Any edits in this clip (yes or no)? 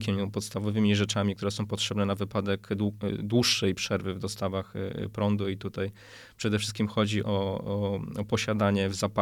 yes